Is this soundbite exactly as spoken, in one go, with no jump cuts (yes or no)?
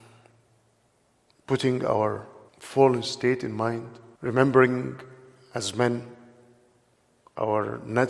no